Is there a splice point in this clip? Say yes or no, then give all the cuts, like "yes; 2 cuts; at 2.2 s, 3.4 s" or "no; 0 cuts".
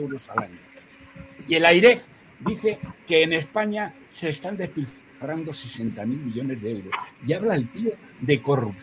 no; 0 cuts